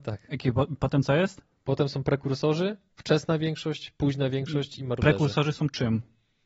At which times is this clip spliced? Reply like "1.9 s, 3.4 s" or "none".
none